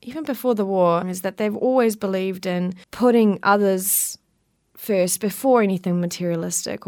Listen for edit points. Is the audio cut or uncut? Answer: cut